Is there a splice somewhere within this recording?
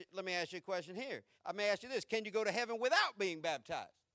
yes; 1 cut; at 1.4 s

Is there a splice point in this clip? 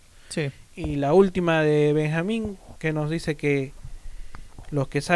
no; 0 cuts

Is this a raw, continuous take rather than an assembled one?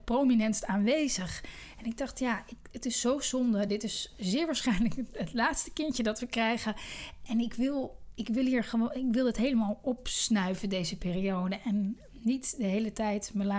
yes; 0 cuts

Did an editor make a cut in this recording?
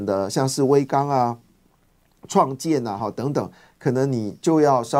no; 0 cuts

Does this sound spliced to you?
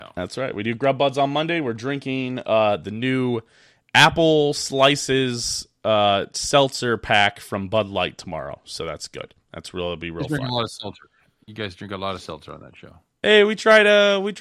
no; 0 cuts

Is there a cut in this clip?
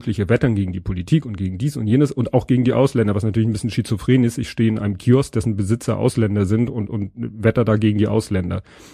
no; 0 cuts

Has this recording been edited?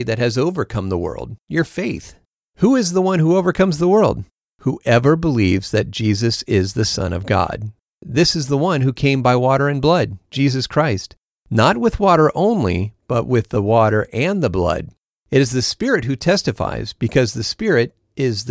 no; 0 cuts

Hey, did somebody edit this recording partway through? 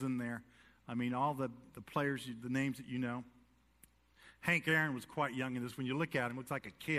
no; 0 cuts

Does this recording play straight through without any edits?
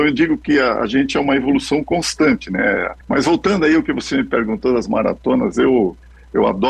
no; 1 cut; at 3.0 s

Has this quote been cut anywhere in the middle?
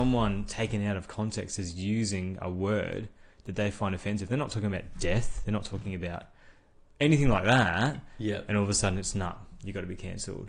no; 0 cuts

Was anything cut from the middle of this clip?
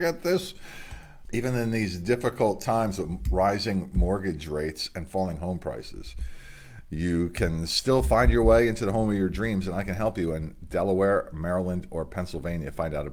yes; 1 cut; at 1.3 s

